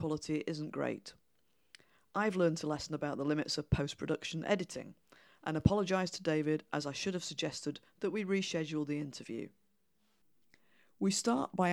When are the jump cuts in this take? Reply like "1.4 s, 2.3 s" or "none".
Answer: none